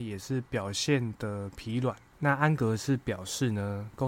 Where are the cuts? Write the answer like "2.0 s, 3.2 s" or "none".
2.1 s